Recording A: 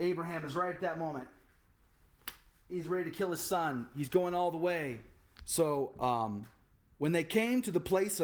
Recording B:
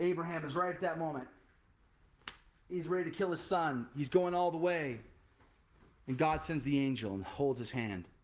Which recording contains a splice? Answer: A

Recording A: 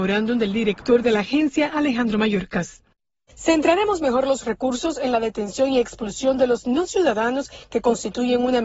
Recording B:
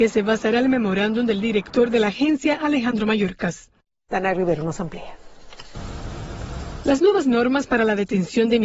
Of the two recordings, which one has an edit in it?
B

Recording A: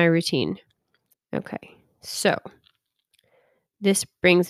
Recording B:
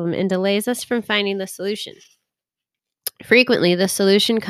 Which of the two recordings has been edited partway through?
A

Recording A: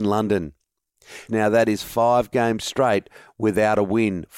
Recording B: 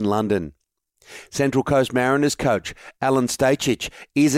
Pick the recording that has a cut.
A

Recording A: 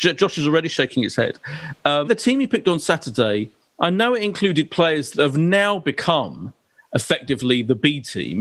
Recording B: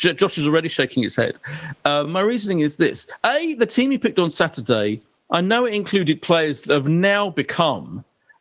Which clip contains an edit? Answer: A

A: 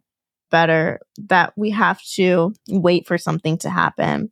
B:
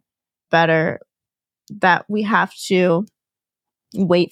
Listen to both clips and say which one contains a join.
A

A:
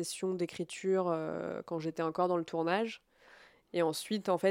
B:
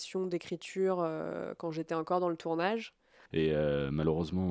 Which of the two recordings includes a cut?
B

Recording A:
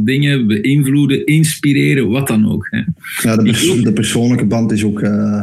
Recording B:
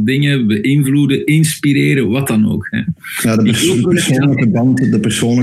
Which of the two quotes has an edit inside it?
A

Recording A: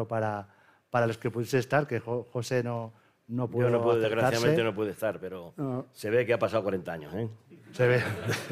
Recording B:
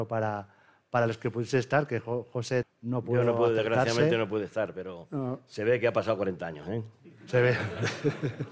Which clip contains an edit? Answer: B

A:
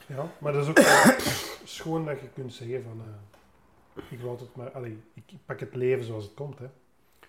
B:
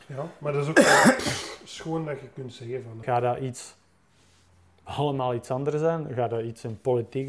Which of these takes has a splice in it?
B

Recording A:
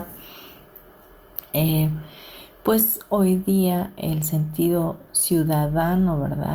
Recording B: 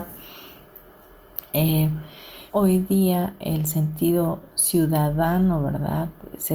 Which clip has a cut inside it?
B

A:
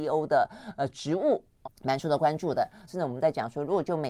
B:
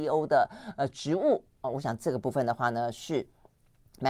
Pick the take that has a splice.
A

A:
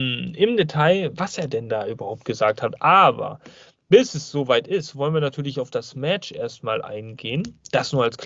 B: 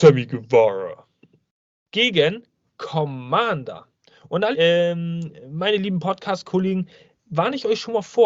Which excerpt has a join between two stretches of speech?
B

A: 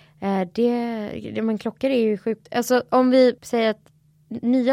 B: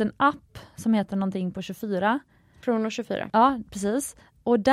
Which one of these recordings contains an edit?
A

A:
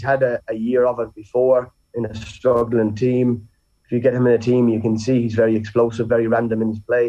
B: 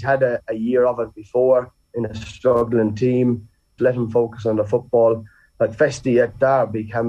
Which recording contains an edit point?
B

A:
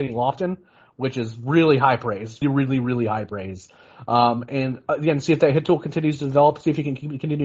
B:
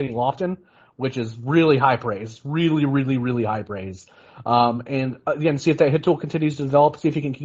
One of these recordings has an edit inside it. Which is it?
A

